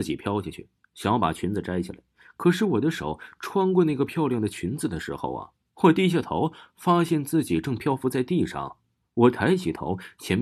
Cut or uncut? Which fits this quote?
uncut